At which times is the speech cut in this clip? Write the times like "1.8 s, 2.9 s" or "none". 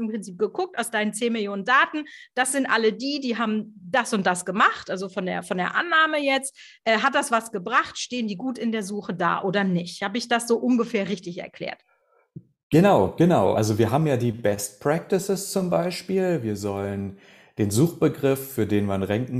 none

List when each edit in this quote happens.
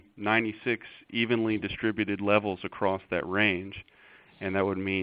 none

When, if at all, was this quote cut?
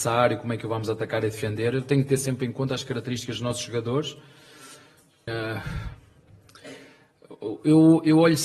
5.3 s

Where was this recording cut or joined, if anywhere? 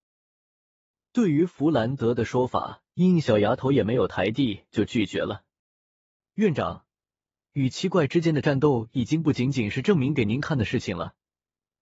2.9 s

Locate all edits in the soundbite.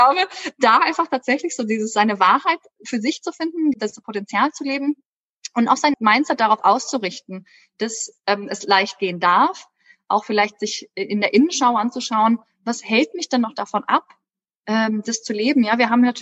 3.7 s, 5.9 s

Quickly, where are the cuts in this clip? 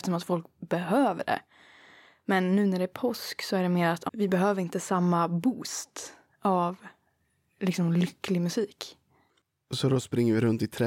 4.1 s

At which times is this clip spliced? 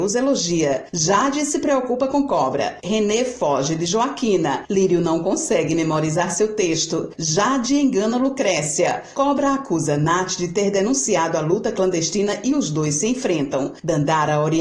7.1 s

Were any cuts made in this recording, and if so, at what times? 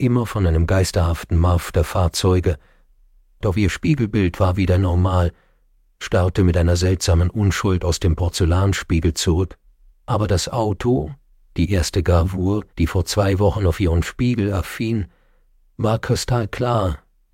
9.9 s, 12.7 s

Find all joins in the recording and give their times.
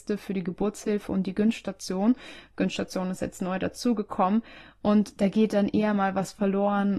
none

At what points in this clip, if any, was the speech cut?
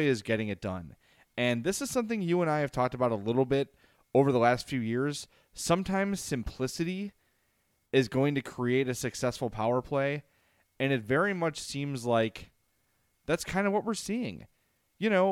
none

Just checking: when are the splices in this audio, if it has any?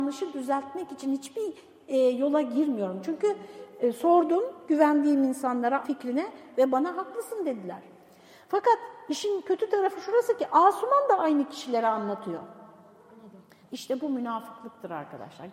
5.8 s, 13.6 s

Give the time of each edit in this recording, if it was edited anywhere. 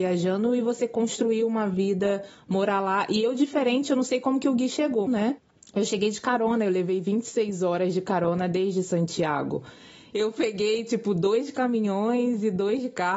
5.1 s, 10.1 s

